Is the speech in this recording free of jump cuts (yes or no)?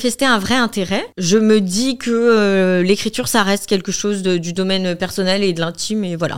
no